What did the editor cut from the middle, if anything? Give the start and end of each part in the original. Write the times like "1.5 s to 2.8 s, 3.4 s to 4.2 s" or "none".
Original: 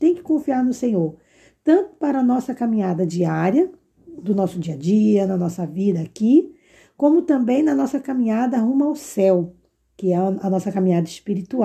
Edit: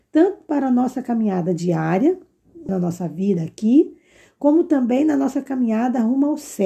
4.2 s to 5.3 s